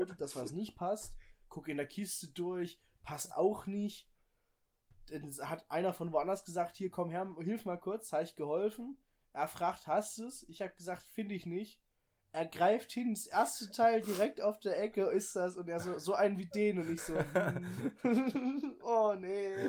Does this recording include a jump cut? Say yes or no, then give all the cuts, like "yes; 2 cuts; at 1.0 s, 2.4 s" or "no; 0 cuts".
no; 0 cuts